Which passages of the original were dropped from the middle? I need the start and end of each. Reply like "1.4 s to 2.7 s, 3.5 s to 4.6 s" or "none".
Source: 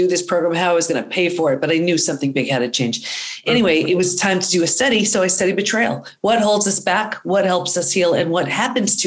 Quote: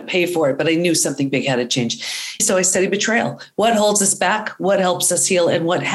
3.4 s to 5.1 s